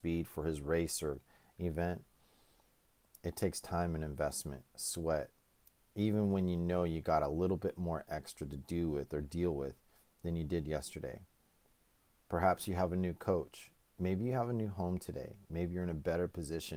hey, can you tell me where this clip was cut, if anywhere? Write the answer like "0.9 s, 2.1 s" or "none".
none

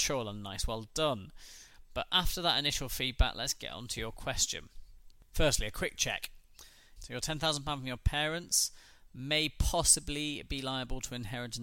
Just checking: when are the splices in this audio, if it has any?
7.0 s

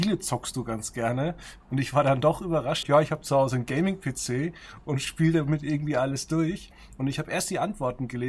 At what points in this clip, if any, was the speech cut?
2.8 s

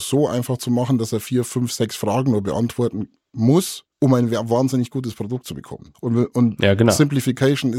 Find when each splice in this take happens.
3.9 s, 5.9 s

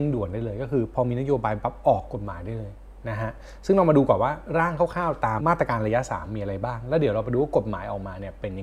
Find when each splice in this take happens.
5.4 s

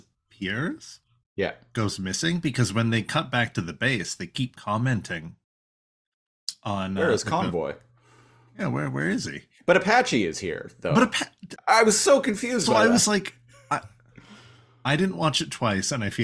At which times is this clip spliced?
11.6 s

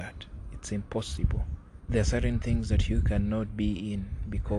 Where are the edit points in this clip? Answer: 1.9 s

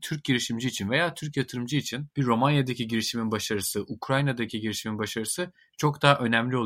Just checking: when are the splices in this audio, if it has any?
2.1 s

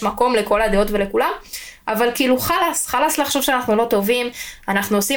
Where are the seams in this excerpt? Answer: none

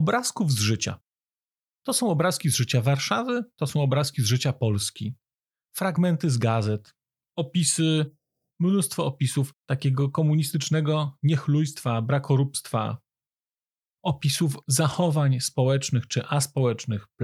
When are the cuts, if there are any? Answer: none

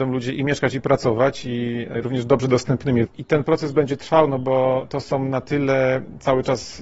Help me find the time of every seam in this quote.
3.1 s

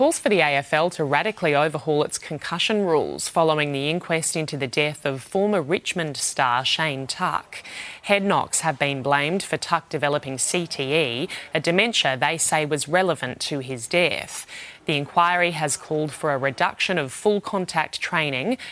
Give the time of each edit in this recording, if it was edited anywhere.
none

